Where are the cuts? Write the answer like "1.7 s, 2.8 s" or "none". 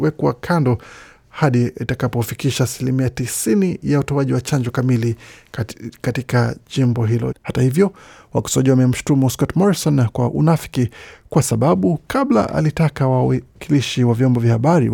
7.3 s